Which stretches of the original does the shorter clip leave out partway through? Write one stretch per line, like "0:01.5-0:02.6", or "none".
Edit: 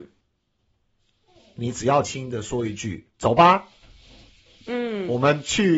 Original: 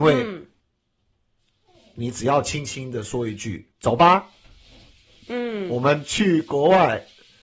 0:02.4-0:02.7